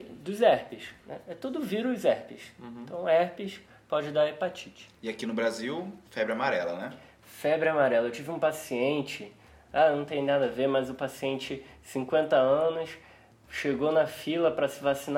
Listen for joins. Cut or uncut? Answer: uncut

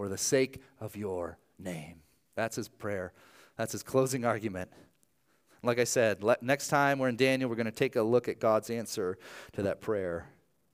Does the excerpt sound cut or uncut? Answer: uncut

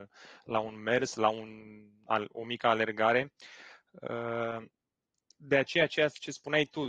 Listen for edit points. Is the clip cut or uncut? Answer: uncut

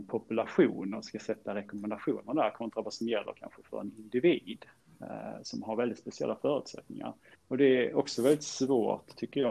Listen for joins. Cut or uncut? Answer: cut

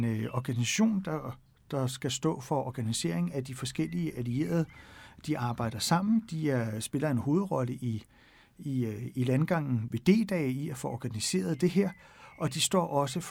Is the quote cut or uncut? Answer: cut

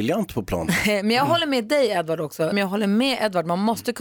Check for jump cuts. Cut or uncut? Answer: cut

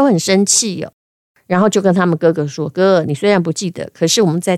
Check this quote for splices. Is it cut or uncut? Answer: uncut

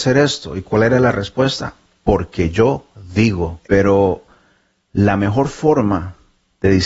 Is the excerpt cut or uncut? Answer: cut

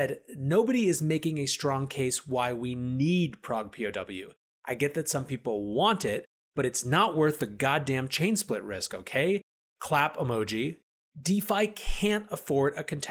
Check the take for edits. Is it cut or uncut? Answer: uncut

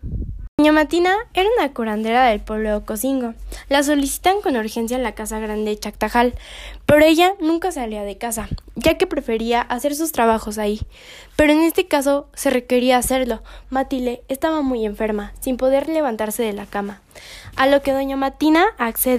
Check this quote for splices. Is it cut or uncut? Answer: cut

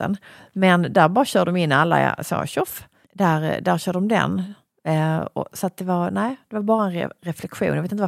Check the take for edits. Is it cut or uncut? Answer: uncut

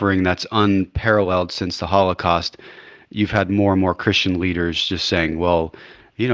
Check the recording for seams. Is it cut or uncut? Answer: uncut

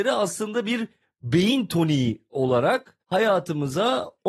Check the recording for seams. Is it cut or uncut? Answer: cut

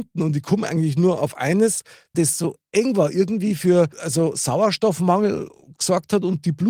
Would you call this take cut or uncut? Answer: cut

